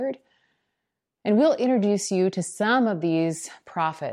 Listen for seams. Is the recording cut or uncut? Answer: uncut